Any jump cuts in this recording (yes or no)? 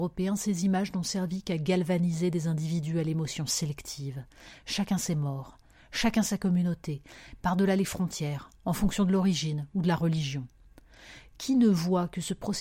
no